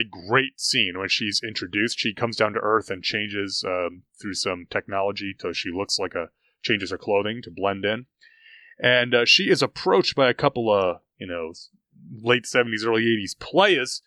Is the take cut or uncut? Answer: uncut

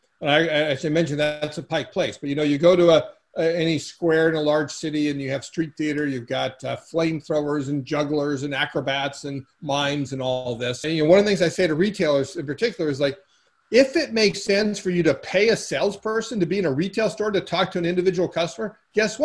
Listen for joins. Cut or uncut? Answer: cut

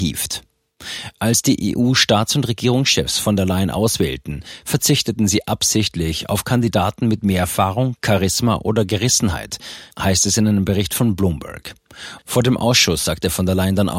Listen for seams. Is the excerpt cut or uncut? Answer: cut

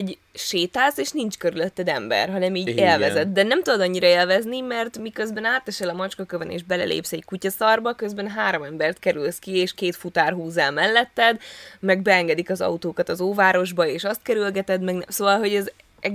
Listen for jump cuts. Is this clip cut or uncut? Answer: uncut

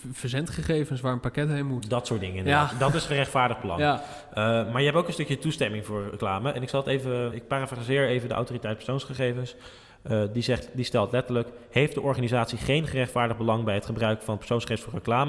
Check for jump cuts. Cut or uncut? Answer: cut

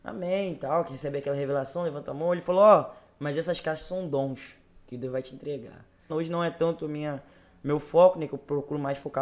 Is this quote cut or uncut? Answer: cut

